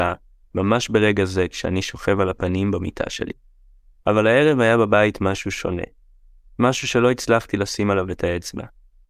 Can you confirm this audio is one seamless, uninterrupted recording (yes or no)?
no